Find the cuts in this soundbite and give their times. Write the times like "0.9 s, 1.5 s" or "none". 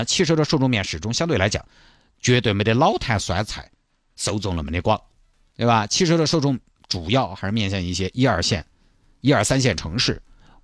none